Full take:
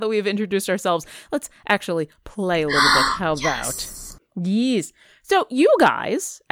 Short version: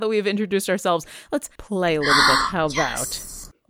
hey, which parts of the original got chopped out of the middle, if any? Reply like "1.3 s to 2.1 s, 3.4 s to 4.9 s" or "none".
1.6 s to 2.2 s